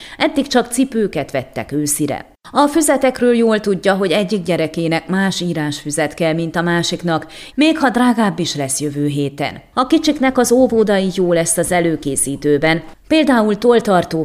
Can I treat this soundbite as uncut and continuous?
no; 3 cuts; at 7.5 s, 9.7 s, 12.9 s

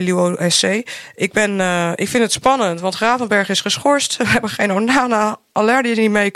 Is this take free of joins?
yes; 0 cuts

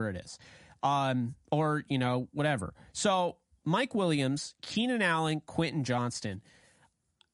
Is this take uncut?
yes; 0 cuts

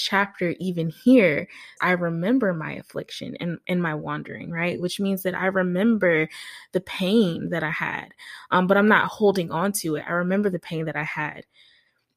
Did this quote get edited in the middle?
yes; 1 cut; at 1.8 s

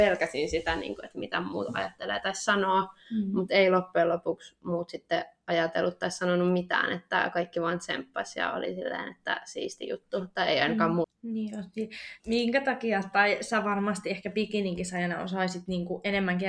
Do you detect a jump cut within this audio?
yes; 2 cuts; at 11.0 s, 12.2 s

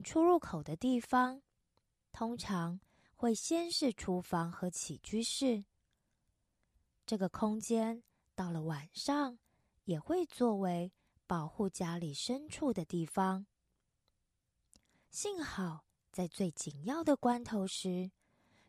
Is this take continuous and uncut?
no; 1 cut; at 14.9 s

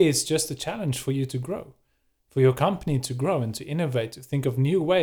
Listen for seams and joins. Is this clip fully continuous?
yes; 0 cuts

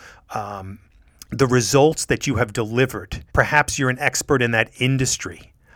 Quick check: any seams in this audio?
yes; 2 cuts; at 1.3 s, 3.3 s

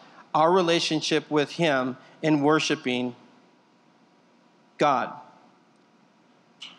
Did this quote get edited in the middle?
no; 0 cuts

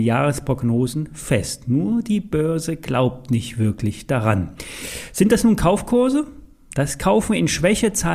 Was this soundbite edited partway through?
yes; 1 cut; at 6.7 s

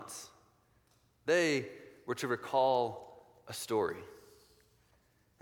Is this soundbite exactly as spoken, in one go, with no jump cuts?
yes; 0 cuts

